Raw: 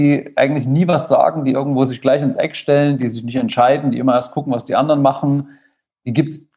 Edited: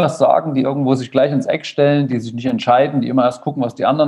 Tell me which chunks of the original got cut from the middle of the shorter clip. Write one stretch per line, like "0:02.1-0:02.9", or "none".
none